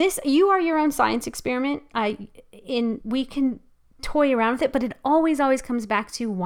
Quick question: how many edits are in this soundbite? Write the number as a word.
one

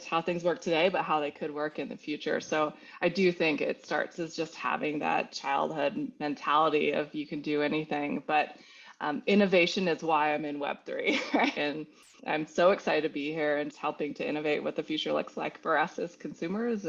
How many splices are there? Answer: two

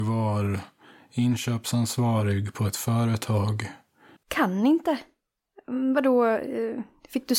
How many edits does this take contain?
one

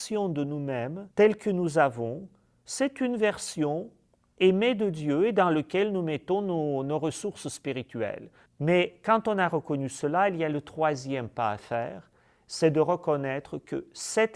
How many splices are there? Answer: one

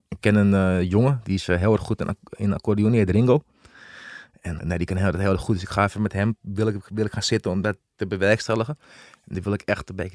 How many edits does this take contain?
one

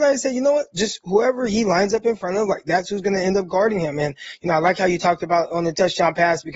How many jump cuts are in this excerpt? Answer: zero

